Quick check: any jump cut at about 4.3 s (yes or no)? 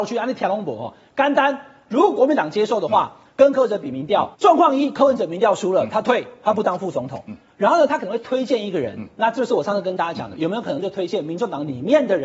yes